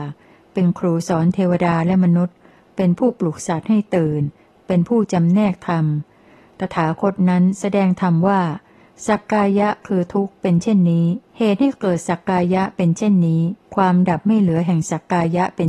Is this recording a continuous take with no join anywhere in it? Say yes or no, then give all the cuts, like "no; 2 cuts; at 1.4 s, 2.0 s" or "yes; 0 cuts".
no; 2 cuts; at 11.3 s, 13.6 s